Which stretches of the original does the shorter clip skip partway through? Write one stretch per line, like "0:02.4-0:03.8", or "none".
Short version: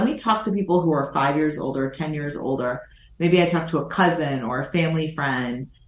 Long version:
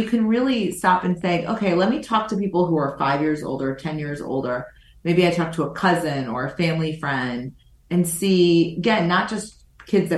none

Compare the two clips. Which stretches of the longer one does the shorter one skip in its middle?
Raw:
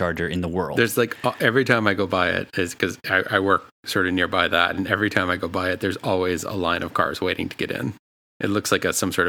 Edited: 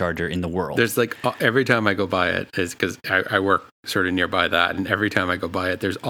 none

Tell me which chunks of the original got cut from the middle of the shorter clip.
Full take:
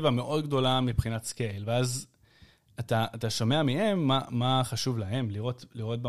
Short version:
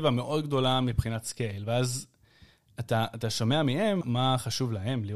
0:04.0-0:04.3

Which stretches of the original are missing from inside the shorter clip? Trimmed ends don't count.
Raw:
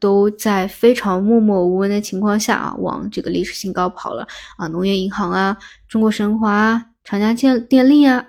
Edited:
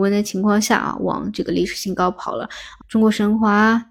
0:04.6-0:05.8

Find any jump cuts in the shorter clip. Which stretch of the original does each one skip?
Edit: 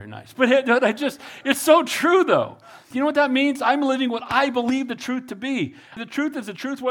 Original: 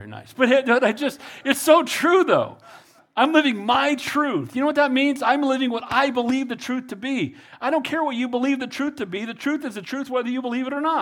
0:02.9-0:04.5
0:07.6-0:09.2

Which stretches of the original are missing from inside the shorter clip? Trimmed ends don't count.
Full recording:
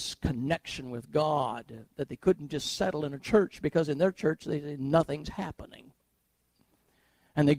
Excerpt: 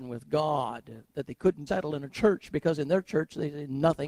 0:02.5-0:02.8

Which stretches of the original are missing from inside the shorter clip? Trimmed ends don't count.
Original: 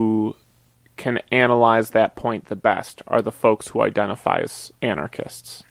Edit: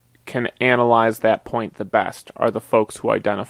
none

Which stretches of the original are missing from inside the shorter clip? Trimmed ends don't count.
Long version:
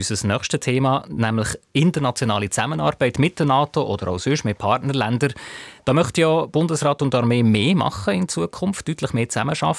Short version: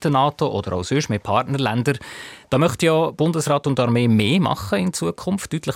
none

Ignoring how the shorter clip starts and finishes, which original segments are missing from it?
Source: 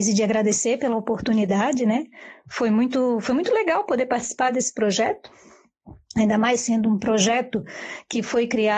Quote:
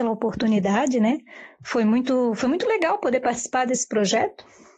none

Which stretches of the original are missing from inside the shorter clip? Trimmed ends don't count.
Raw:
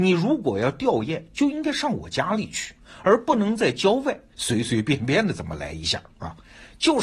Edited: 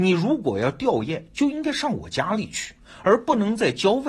none

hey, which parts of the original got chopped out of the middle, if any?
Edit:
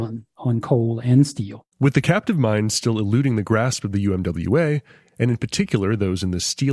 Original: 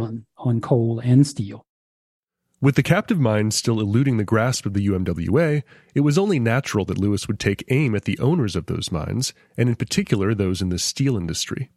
0:01.7-0:02.5
0:05.9-0:09.5

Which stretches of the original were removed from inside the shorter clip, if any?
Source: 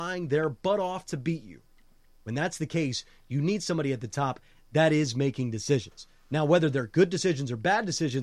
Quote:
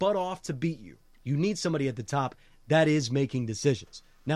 0:01.8-0:03.2

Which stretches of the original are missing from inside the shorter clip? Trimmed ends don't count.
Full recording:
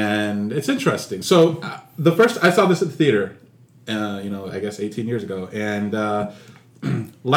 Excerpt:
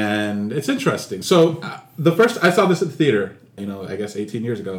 0:03.6-0:04.2

